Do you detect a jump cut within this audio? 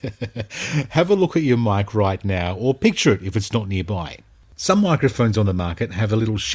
no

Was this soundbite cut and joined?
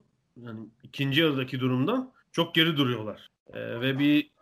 yes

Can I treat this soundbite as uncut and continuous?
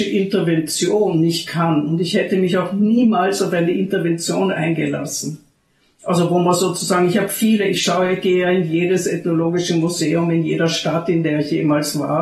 yes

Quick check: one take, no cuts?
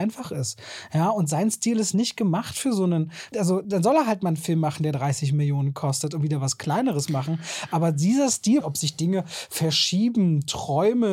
no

